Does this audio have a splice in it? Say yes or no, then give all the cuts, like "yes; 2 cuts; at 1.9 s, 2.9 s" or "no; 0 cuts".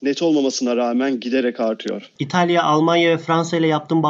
no; 0 cuts